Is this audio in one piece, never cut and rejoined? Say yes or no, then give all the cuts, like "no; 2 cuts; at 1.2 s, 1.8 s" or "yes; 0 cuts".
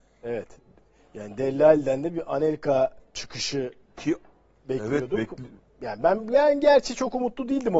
yes; 0 cuts